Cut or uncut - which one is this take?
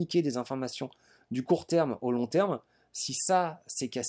uncut